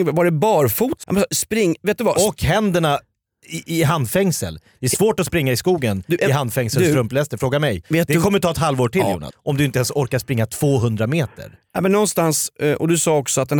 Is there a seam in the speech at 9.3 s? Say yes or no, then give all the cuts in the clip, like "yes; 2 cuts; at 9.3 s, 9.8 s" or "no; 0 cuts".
yes; 3 cuts; at 1.0 s, 7.8 s, 9.3 s